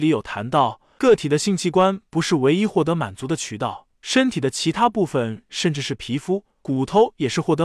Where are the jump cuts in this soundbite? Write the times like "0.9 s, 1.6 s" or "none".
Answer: none